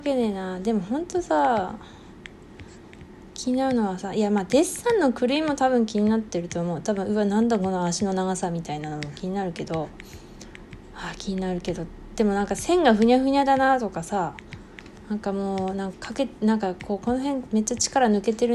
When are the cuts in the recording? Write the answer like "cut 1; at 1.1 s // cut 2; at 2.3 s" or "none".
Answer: cut 1; at 15.9 s

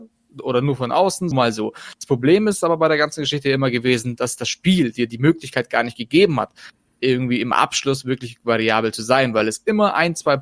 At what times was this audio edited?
cut 1; at 1.3 s

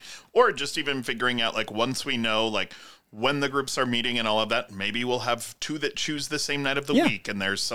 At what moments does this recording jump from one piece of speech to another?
none

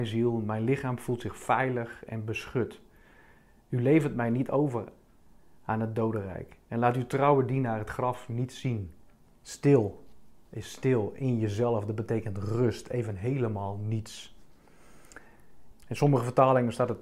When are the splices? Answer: cut 1; at 9.3 s // cut 2; at 15.7 s

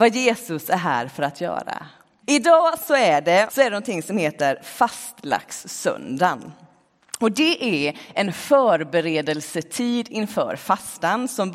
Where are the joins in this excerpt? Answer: cut 1; at 2.2 s // cut 2; at 3.5 s

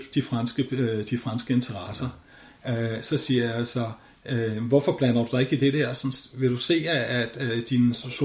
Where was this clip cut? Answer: none

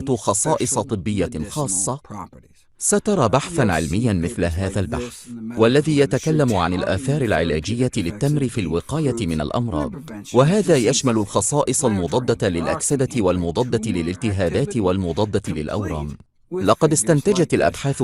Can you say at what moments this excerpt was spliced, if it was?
none

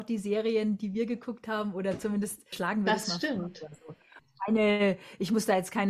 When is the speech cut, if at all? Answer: cut 1; at 2.5 s // cut 2; at 4.2 s

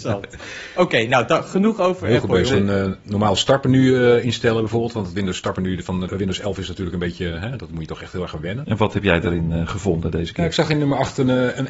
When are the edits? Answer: cut 1; at 2.5 s // cut 2; at 8.6 s

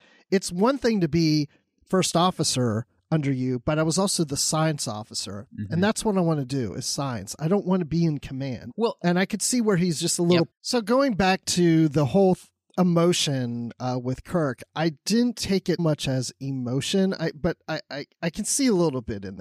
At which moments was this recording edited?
cut 1; at 8.7 s // cut 2; at 10.5 s // cut 3; at 15.8 s

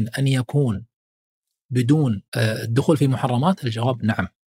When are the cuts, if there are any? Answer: cut 1; at 2.3 s

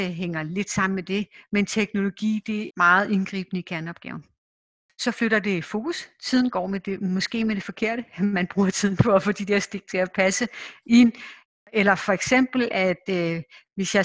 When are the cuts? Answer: cut 1; at 2.7 s

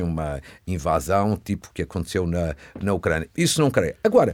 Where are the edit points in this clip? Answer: cut 1; at 3.3 s

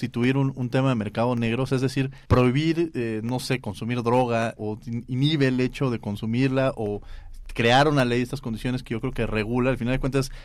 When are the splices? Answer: cut 1; at 2.2 s // cut 2; at 4.6 s

